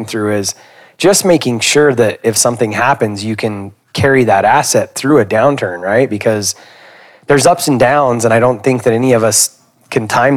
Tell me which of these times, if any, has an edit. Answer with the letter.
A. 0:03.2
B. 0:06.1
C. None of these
C